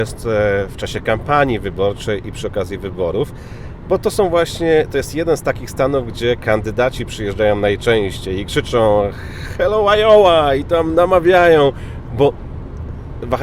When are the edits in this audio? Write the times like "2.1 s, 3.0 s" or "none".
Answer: none

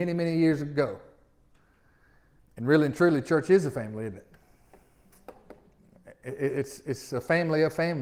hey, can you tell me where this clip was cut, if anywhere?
2.4 s

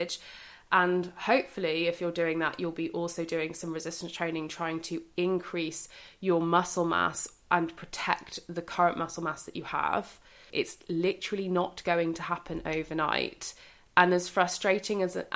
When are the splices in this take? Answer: 10.5 s

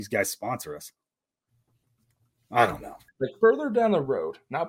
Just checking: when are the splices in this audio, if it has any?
3.1 s

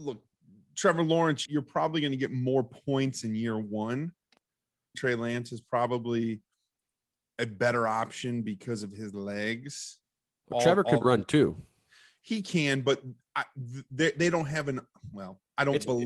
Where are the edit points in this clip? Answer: 1.5 s, 4.9 s

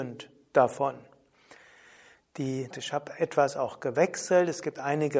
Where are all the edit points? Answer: 2.7 s

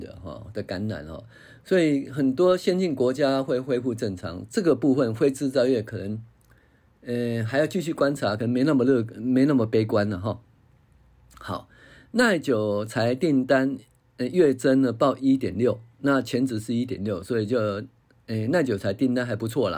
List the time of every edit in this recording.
none

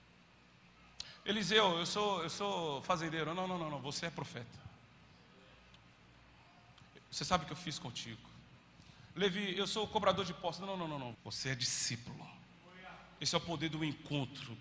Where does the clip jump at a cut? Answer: 11.1 s

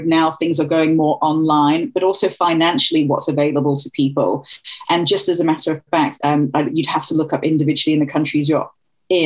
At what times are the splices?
4.8 s, 6.2 s

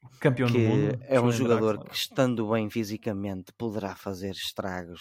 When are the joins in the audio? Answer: none

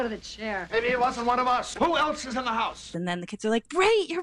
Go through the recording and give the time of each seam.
1.8 s, 2.9 s

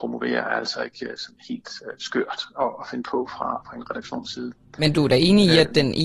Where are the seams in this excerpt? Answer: none

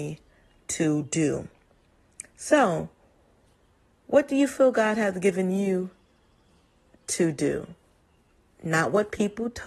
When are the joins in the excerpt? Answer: none

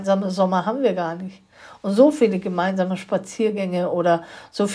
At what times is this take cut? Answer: none

